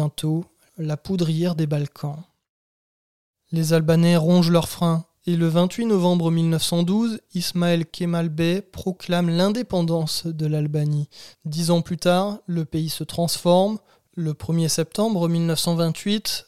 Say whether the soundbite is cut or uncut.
cut